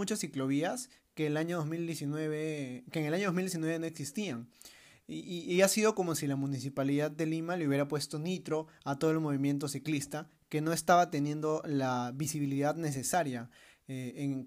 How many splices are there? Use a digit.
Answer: 0